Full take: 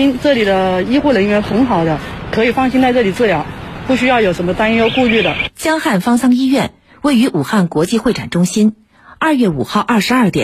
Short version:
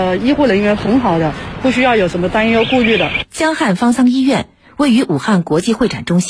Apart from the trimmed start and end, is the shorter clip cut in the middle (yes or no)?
yes